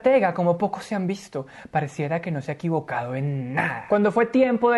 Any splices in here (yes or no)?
no